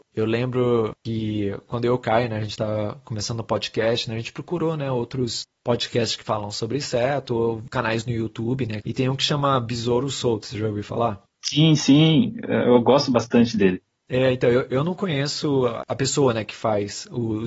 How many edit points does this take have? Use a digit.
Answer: 1